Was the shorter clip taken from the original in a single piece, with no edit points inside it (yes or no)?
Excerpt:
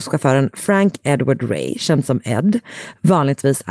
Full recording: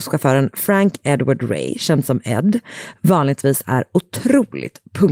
yes